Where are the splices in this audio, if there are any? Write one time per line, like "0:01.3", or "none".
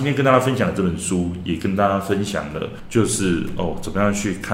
none